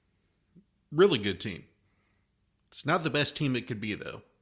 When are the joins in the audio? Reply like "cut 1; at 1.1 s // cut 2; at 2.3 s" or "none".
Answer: none